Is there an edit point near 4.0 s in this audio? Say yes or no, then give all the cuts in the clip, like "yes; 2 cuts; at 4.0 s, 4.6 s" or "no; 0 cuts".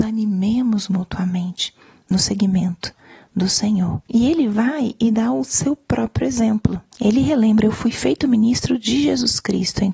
yes; 2 cuts; at 4.0 s, 6.9 s